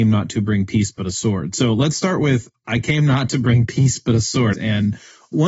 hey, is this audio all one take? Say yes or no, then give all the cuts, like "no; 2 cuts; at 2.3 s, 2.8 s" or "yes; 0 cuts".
no; 1 cut; at 4.5 s